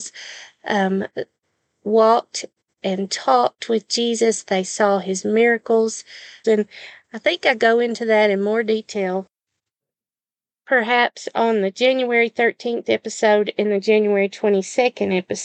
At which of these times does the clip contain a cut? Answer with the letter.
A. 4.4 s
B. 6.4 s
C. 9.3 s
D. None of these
B